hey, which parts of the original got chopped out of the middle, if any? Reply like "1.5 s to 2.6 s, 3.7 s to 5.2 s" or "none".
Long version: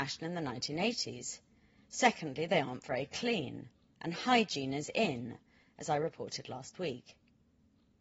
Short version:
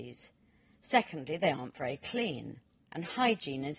none